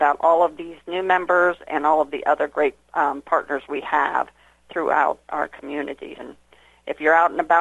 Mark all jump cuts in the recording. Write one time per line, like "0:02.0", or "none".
0:06.2